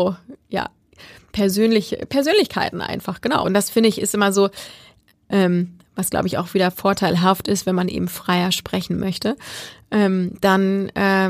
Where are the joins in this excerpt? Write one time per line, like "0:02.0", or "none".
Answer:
0:03.4
0:05.3